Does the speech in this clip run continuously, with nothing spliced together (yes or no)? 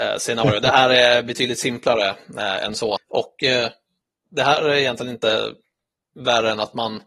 no